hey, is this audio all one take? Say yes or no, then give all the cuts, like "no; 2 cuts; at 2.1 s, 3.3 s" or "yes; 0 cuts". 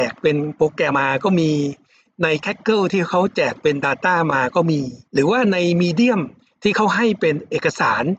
no; 2 cuts; at 0.9 s, 5.0 s